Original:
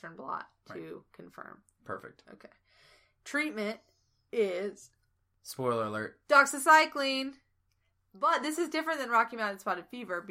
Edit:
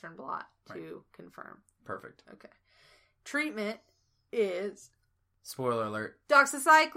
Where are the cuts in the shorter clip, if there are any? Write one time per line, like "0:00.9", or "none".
none